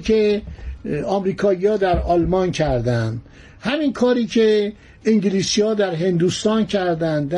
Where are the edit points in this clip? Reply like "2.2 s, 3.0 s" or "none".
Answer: none